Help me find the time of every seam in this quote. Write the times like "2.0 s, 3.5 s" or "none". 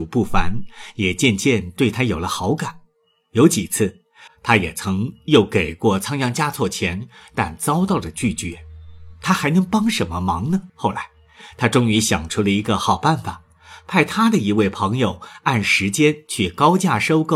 4.3 s, 10.7 s